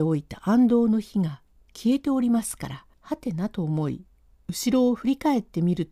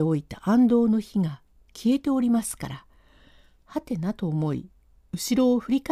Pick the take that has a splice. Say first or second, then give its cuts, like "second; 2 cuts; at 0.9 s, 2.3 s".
first; 1 cut; at 2.9 s